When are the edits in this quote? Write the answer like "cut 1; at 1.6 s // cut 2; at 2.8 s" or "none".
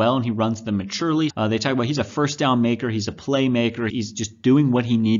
cut 1; at 1.3 s // cut 2; at 3.9 s